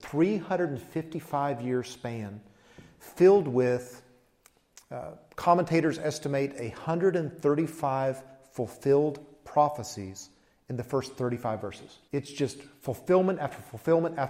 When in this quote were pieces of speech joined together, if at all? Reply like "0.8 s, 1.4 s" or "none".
12.1 s